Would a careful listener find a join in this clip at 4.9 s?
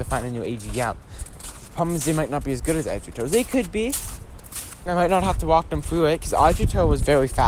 yes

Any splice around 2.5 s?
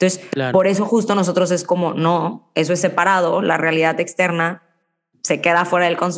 no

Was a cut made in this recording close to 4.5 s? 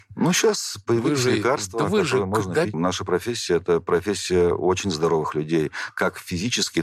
no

